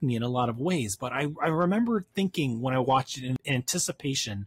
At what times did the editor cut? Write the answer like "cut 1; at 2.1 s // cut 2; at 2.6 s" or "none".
none